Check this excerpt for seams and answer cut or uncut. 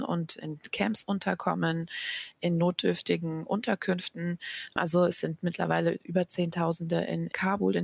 uncut